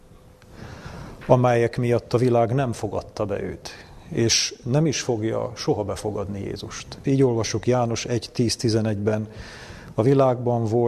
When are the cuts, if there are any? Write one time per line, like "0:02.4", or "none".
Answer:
0:07.0